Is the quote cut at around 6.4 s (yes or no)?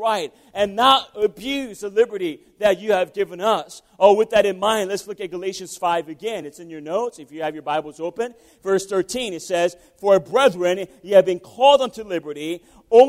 no